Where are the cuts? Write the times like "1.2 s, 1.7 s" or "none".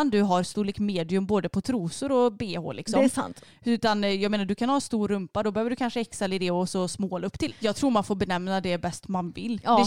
7.5 s